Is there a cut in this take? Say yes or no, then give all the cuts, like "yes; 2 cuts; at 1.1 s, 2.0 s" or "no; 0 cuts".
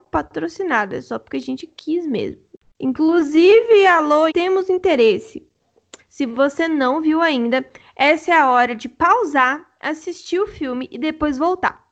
yes; 2 cuts; at 4.3 s, 6.0 s